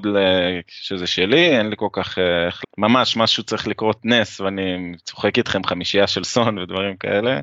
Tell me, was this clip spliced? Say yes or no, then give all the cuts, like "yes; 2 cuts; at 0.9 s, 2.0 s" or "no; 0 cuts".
yes; 1 cut; at 2.6 s